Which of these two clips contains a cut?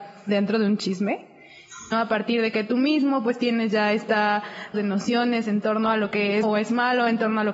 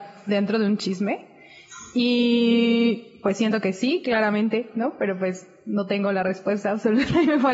first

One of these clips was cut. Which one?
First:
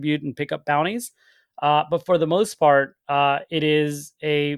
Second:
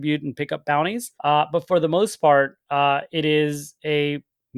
second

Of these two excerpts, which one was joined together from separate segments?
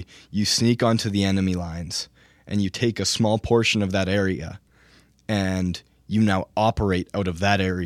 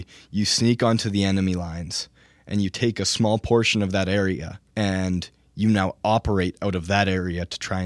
second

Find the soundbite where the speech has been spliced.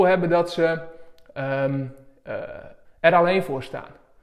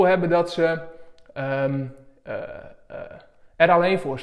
first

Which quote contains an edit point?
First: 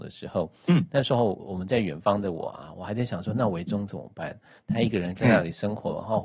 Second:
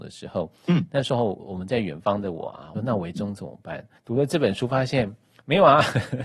second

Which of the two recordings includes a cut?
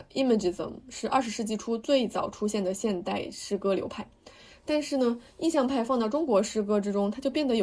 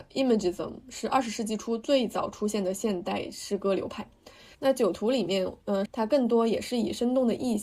second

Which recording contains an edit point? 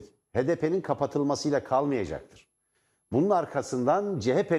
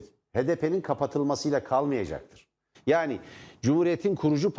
second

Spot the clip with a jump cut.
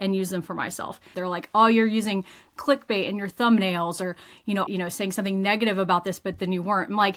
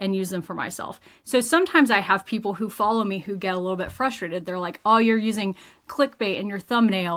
first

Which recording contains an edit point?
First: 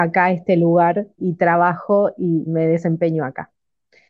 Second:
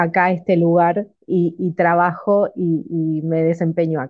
first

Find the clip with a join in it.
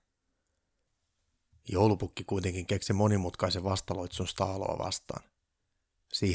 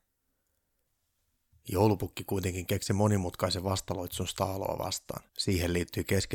second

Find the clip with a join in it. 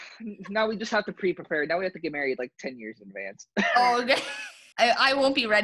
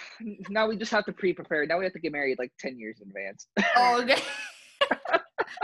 first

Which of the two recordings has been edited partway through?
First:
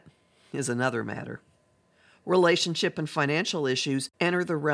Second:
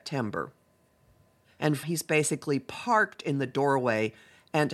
second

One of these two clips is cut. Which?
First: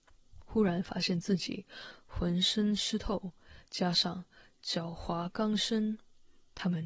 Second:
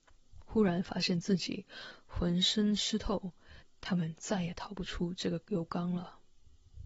second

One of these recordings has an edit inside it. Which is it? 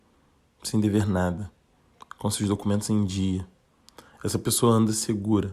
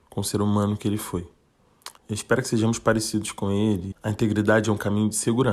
second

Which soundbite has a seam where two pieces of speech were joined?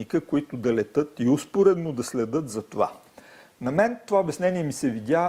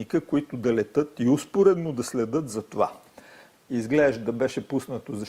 second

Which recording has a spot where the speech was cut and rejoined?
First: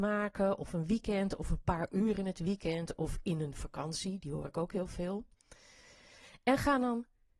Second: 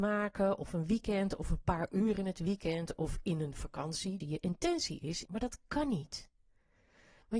second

